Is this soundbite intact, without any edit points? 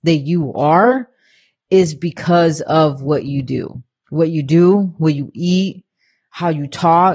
yes; 0 cuts

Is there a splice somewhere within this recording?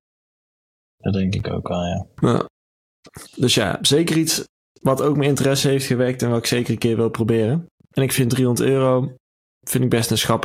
no; 0 cuts

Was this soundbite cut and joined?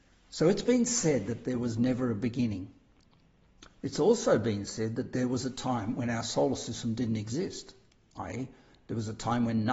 no; 0 cuts

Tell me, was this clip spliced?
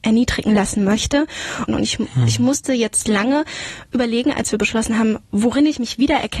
yes; 2 cuts; at 1.7 s, 5.2 s

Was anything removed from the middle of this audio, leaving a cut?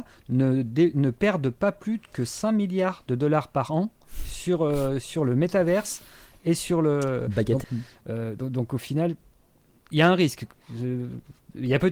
yes; 1 cut; at 7.6 s

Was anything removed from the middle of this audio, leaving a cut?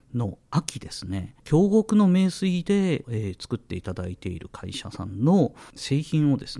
yes; 2 cuts; at 1.4 s, 3.0 s

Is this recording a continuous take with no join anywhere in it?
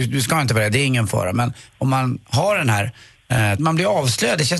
no; 1 cut; at 3.6 s

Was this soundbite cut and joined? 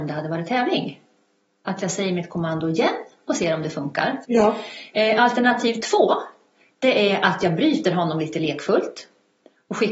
yes; 1 cut; at 4.2 s

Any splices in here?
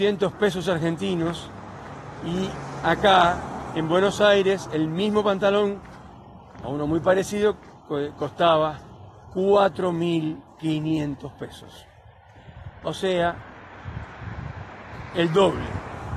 no; 0 cuts

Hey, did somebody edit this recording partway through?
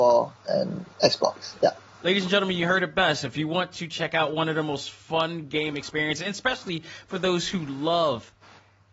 no; 0 cuts

